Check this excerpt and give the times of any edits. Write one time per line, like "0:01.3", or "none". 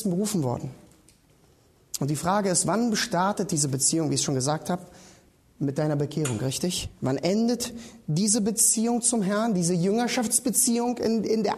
none